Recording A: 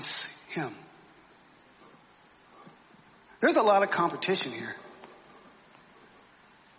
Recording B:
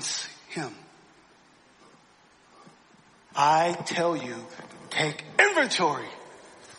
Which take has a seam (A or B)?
B